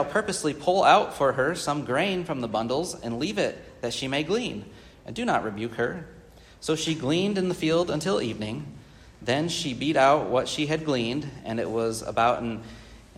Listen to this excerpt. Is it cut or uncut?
uncut